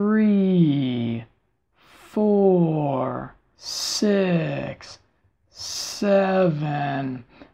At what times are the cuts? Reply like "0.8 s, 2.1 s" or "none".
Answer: 3.6 s